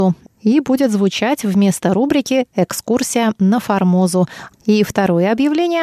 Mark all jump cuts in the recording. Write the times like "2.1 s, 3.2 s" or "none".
4.5 s